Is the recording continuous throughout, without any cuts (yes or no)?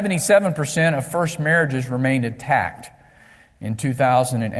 yes